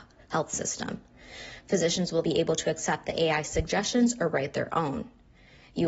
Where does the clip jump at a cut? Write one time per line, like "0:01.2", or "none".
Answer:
0:02.2